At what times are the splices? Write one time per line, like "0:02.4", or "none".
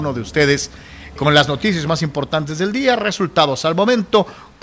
0:01.2